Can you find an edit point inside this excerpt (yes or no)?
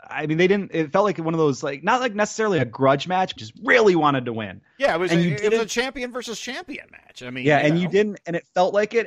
yes